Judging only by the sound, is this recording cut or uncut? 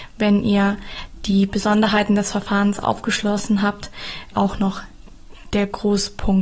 cut